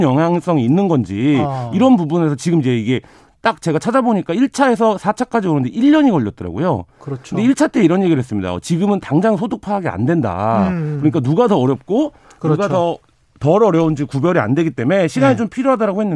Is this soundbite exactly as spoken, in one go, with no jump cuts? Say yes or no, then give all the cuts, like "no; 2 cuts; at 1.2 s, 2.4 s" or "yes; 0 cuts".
yes; 0 cuts